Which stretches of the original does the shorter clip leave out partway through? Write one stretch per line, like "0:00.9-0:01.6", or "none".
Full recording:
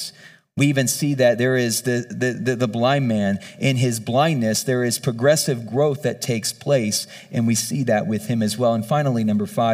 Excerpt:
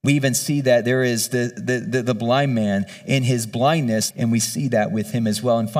0:04.6-0:07.3